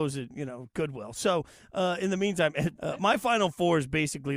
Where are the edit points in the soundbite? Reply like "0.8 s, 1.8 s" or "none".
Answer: 2.7 s

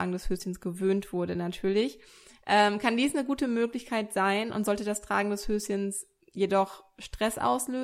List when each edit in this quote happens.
none

